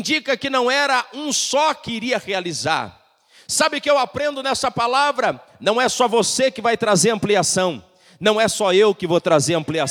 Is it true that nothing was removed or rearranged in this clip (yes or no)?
yes